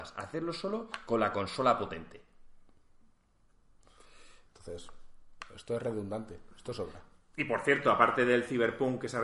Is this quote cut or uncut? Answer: cut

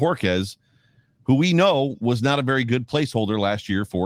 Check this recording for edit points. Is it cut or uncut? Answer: uncut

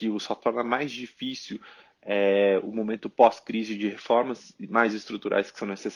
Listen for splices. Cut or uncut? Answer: cut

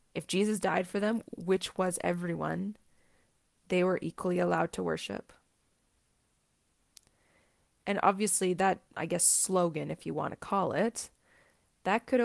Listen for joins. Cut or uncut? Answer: uncut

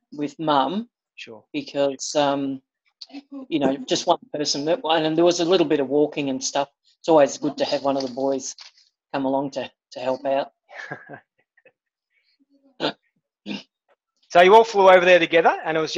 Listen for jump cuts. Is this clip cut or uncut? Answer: uncut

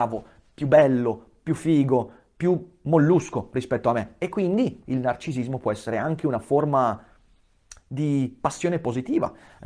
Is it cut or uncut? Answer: cut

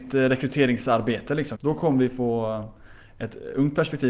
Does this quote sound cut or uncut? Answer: cut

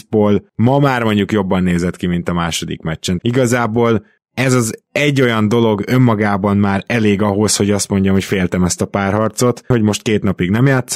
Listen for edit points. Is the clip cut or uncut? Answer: cut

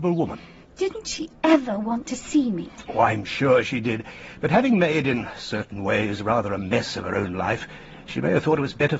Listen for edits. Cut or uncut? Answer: uncut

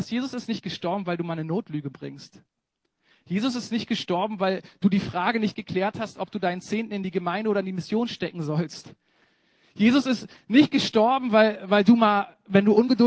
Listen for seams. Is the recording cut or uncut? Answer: uncut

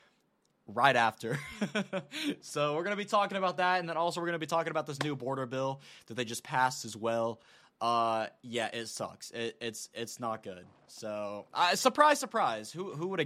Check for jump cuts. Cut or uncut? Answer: uncut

